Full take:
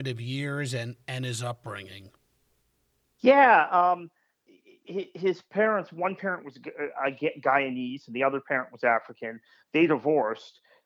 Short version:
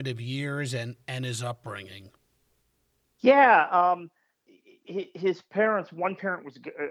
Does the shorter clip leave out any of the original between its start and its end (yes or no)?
no